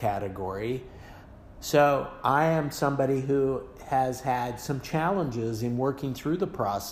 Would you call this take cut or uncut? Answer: uncut